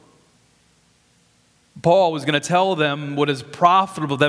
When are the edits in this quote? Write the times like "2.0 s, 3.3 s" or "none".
1.7 s

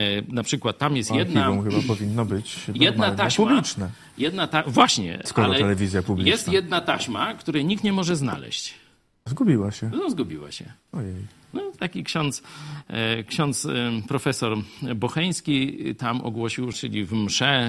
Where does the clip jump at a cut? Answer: 16.7 s

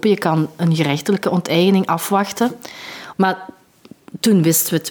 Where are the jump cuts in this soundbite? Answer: 3.1 s

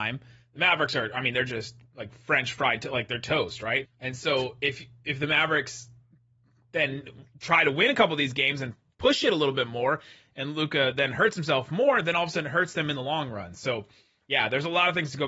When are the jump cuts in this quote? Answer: 3.8 s

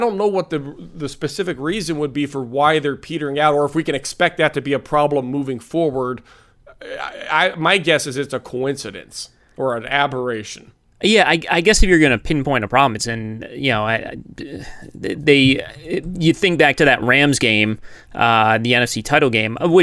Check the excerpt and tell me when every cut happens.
13.0 s

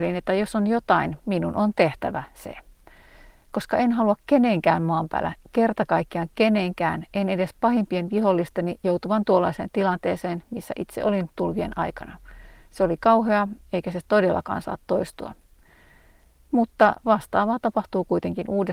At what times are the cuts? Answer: 1.2 s

